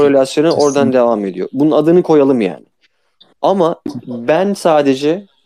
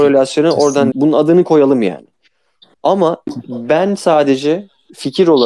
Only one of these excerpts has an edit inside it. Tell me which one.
second; 1 cut; at 0.9 s

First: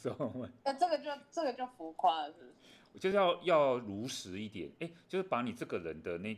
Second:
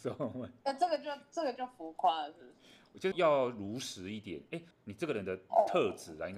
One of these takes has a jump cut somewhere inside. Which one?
second; 2 cuts; at 3.1 s, 4.7 s

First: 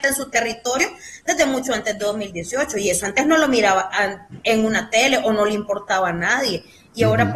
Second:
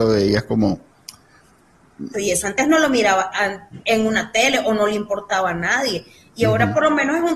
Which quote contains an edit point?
second; 1 cut; at 2.1 s

